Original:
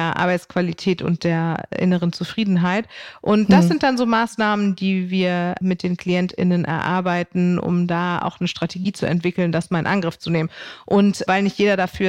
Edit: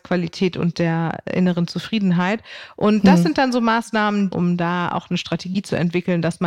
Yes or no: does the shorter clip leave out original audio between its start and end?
yes